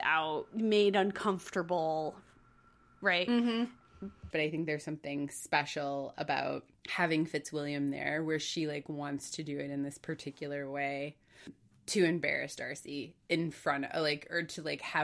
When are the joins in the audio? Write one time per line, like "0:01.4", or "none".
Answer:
0:04.3
0:06.8